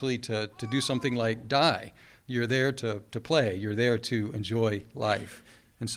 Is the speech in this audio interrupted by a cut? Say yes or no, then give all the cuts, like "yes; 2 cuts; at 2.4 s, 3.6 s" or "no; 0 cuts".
no; 0 cuts